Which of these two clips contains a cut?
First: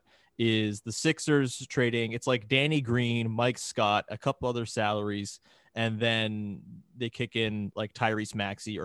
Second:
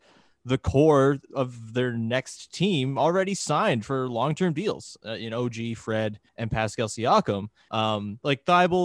second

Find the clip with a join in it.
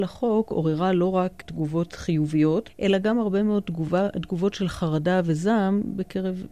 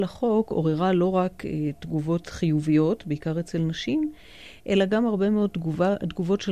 first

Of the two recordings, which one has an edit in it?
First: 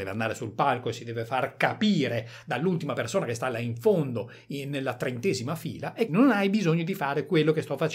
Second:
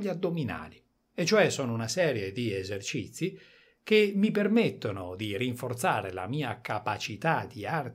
first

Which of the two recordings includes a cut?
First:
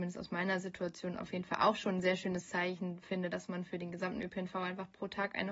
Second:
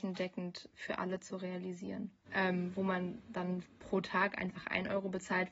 second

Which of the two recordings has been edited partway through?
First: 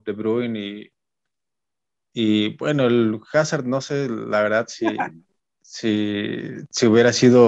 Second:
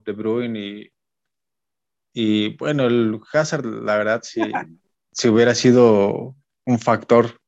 second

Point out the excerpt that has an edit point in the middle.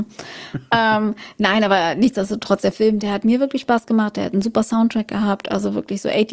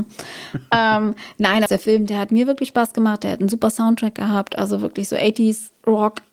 second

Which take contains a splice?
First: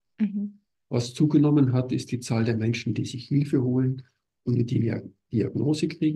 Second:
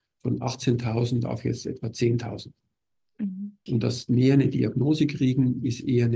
second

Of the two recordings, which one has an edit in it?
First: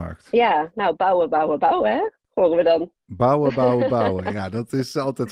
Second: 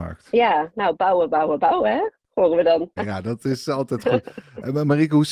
second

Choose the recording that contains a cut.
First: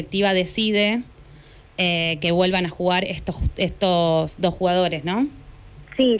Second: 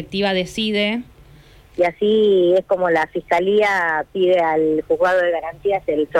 second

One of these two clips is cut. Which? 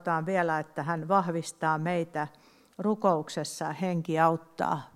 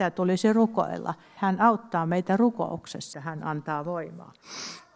second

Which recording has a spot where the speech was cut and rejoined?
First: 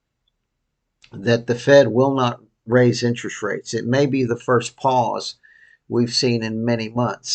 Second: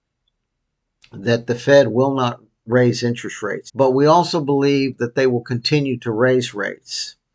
second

